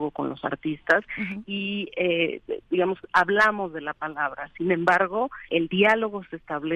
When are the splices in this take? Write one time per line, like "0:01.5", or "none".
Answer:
0:01.4
0:05.5

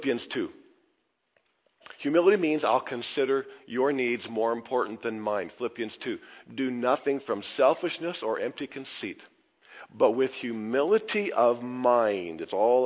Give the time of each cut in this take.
none

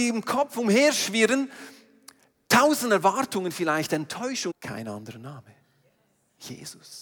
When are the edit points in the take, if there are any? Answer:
0:04.5

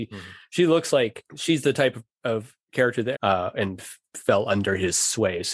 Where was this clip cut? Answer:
0:03.1

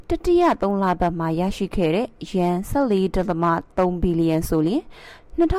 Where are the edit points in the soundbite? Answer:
none

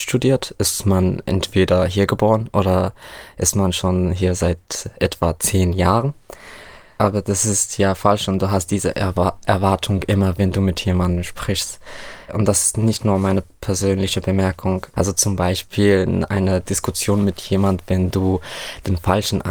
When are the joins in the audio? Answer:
0:14.9

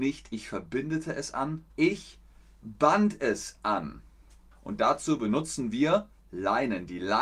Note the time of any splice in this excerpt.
0:01.7
0:04.5

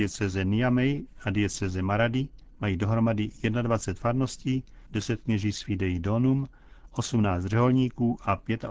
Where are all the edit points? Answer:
0:04.9

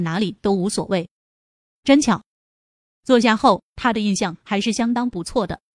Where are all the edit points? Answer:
0:01.8
0:03.7

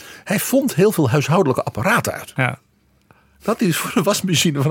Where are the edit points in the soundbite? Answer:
0:02.4

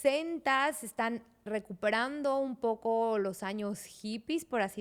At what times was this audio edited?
0:01.5

